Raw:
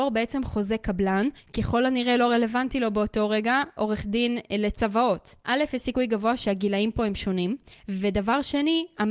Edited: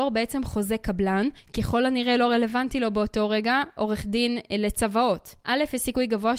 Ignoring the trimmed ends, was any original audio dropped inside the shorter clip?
no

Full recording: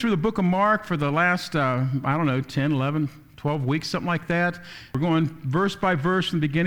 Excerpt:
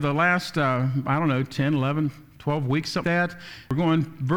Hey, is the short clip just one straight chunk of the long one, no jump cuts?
no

